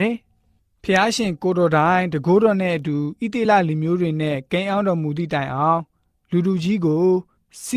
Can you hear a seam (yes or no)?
no